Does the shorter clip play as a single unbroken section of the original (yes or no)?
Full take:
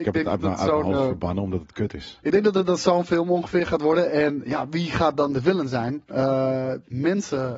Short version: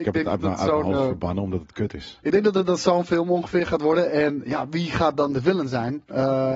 yes